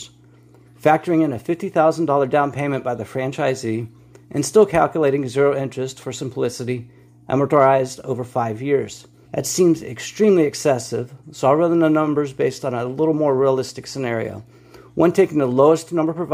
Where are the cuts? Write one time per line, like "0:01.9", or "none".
0:09.2

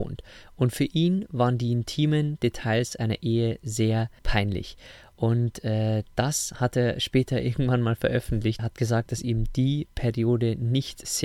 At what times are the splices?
0:04.2
0:08.6

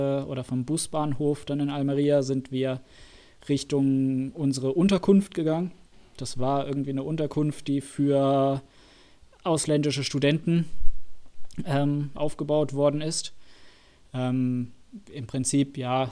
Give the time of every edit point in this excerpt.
0:12.2

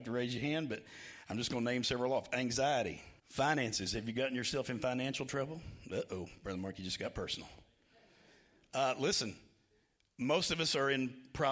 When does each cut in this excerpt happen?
0:03.2

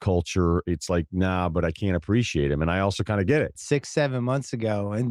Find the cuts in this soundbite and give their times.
0:03.6

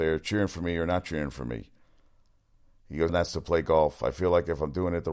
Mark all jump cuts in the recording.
0:03.1

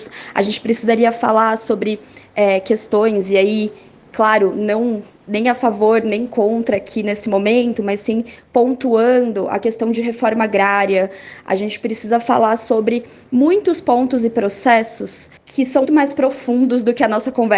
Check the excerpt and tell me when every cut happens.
0:15.8

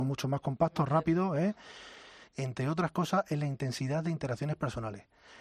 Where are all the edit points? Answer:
0:02.3

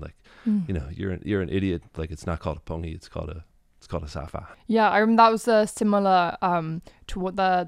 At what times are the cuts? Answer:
none

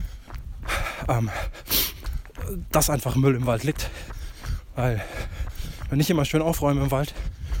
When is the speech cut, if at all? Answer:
none

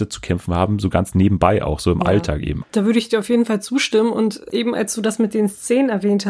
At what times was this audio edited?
0:02.6

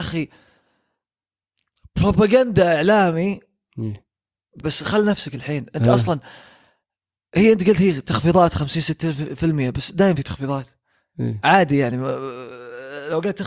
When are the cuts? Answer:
0:04.6

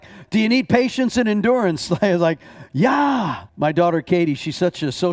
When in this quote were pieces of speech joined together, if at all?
0:03.5

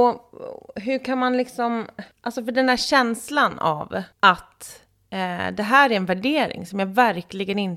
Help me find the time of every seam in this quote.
0:02.1
0:04.1

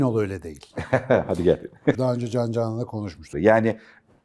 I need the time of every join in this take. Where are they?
0:02.0
0:03.3

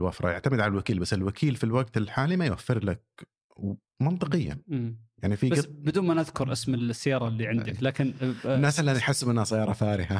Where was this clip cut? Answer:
none

